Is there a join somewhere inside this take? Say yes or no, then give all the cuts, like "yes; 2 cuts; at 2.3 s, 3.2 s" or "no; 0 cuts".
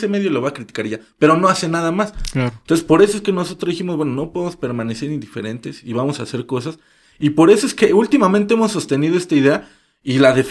no; 0 cuts